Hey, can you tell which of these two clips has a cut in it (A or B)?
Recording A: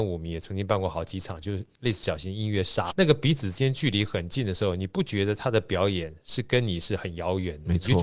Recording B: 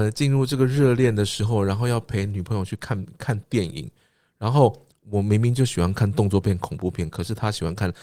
A